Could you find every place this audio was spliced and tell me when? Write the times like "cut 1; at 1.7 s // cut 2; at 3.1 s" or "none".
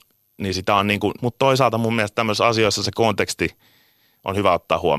cut 1; at 1.2 s